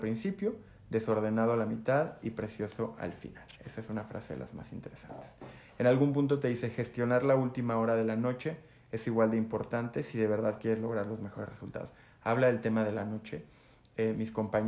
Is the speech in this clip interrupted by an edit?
no; 0 cuts

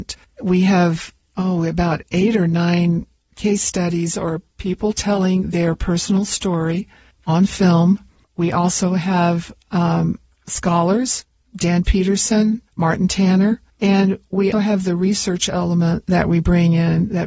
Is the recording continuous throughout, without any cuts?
no; 2 cuts; at 12.7 s, 14.5 s

